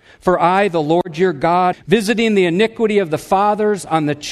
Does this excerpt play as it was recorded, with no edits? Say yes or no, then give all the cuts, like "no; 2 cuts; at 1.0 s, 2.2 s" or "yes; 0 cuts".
no; 1 cut; at 1.7 s